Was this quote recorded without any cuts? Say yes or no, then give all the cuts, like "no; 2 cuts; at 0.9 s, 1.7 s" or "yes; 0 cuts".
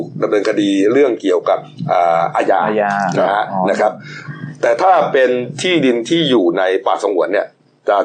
yes; 0 cuts